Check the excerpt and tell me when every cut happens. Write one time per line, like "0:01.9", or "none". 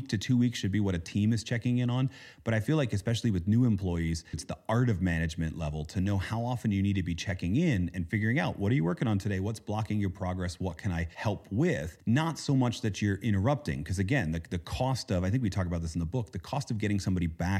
0:04.3